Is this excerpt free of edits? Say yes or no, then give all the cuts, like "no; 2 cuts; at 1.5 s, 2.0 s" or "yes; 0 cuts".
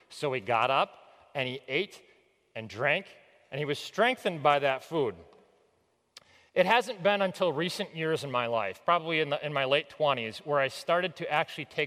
yes; 0 cuts